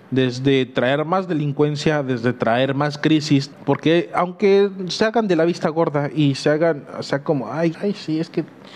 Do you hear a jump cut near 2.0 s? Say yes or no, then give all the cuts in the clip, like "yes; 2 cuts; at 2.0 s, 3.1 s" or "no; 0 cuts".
no; 2 cuts; at 3.5 s, 7.7 s